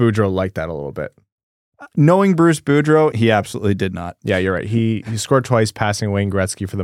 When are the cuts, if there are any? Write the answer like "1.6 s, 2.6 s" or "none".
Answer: 3.1 s